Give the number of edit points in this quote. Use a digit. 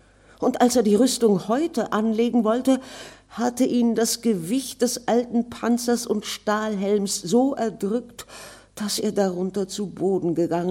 0